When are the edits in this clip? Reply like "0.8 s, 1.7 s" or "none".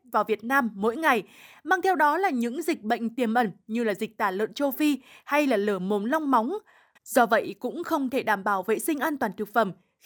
7.0 s